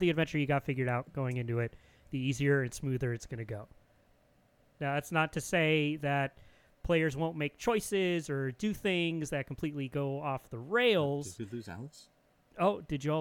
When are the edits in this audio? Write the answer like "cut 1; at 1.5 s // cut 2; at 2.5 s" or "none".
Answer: none